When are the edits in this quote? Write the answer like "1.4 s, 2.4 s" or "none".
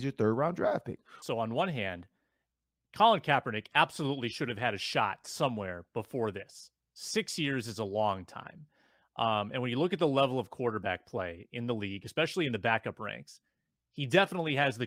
1.2 s